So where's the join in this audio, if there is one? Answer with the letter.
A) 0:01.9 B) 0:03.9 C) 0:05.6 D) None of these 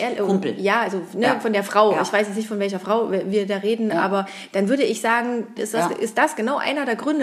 C